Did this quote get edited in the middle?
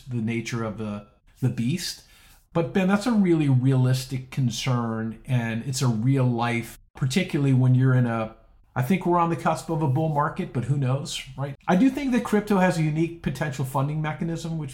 yes; 1 cut; at 11.6 s

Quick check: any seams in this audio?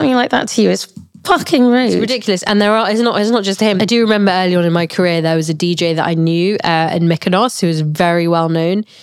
yes; 1 cut; at 3.8 s

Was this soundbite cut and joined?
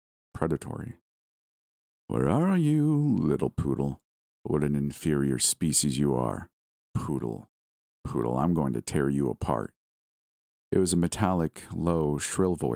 no; 0 cuts

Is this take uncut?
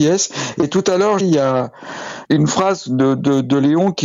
no; 2 cuts; at 1.2 s, 2.2 s

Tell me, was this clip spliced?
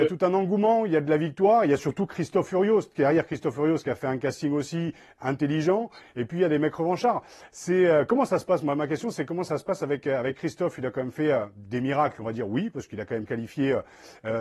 no; 0 cuts

